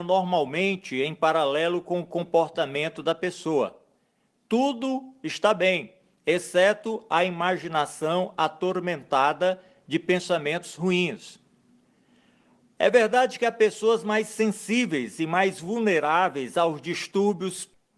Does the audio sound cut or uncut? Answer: uncut